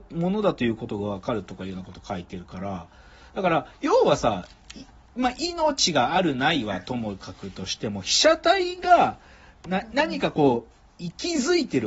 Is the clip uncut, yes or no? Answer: yes